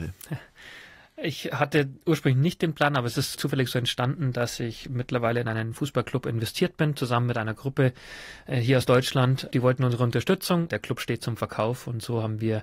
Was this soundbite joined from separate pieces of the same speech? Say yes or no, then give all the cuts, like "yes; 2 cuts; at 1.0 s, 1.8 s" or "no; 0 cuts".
yes; 2 cuts; at 9.5 s, 10.7 s